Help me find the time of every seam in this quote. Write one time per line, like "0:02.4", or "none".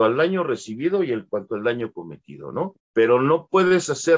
0:02.7